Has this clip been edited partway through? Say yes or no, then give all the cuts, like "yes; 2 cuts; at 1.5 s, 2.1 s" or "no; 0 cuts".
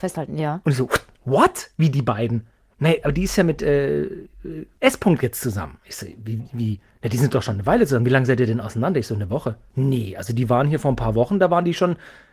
no; 0 cuts